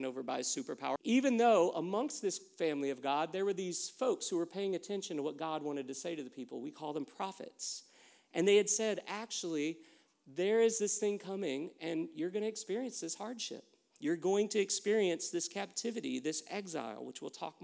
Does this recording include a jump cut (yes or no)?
yes